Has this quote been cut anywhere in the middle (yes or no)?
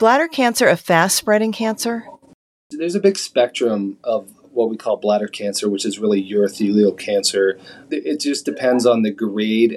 no